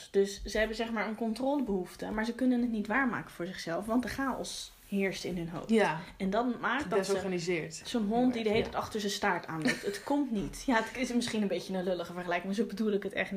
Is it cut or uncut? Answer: uncut